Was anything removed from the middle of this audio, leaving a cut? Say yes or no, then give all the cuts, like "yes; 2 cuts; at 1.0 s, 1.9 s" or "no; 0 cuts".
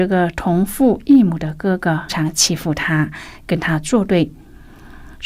yes; 1 cut; at 2.1 s